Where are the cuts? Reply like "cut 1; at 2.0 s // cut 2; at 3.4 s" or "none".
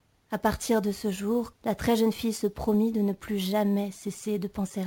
cut 1; at 1.5 s